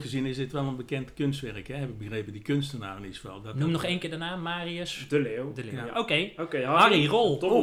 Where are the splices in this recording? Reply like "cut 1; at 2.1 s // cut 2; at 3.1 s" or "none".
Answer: none